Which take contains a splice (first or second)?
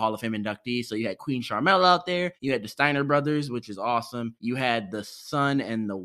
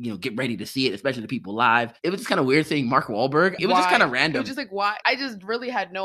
second